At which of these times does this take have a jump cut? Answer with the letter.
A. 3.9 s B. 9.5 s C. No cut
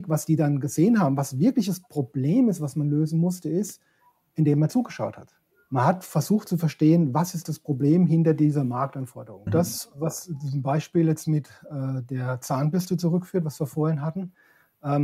B